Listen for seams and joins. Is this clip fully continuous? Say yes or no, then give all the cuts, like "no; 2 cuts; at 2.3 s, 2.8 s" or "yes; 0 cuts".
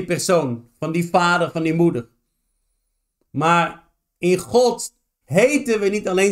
no; 1 cut; at 5.2 s